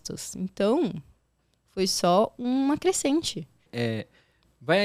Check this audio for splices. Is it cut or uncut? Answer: cut